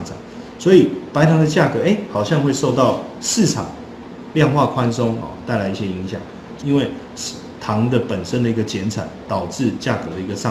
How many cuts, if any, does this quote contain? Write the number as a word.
two